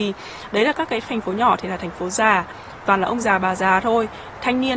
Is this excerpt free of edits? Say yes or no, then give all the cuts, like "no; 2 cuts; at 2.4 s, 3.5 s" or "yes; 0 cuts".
no; 1 cut; at 2.8 s